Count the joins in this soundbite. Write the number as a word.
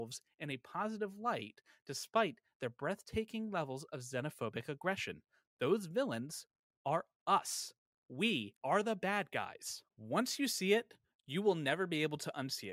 two